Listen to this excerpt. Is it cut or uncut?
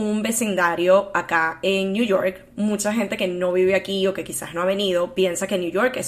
uncut